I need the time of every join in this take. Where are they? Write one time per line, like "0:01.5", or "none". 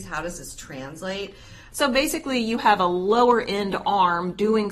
0:01.7